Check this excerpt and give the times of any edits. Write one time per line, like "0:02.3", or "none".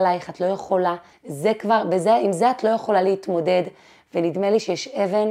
0:01.1